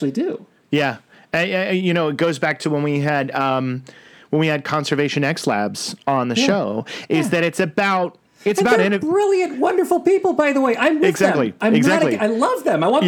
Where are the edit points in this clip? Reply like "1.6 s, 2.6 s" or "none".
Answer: none